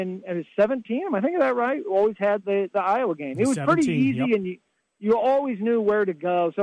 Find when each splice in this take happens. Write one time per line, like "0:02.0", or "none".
none